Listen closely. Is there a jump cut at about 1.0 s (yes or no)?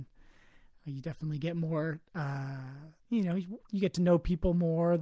no